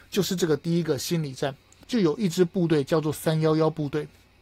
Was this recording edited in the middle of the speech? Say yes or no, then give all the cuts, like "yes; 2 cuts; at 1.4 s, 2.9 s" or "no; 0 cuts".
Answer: yes; 1 cut; at 1.8 s